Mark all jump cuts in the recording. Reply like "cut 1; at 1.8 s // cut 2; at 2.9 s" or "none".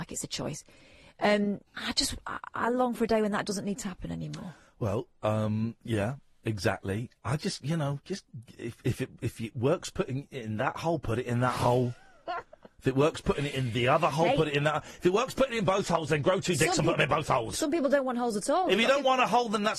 cut 1; at 1.7 s